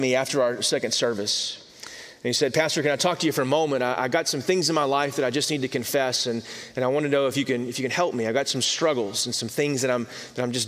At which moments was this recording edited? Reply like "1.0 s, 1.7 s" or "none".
none